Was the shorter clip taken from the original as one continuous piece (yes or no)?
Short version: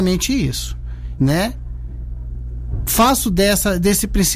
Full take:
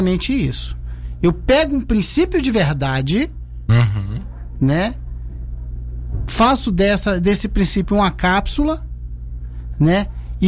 no